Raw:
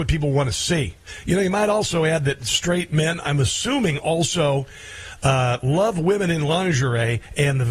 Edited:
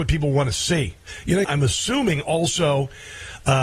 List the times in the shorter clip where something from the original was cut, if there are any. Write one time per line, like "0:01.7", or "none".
0:01.4